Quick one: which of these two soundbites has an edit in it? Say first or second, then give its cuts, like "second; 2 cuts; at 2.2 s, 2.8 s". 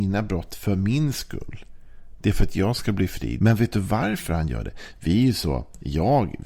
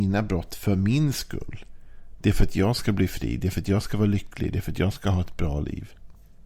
first; 1 cut; at 3.4 s